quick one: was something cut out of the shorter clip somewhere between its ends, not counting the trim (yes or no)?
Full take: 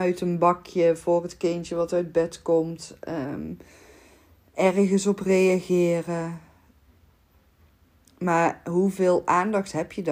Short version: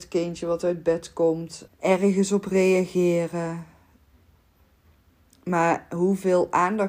yes